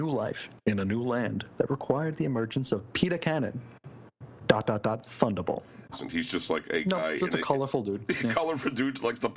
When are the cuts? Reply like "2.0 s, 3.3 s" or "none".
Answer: 5.9 s